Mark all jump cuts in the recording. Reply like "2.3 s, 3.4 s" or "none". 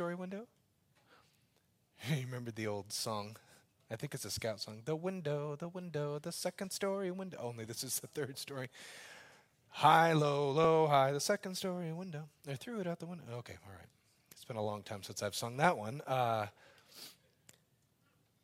none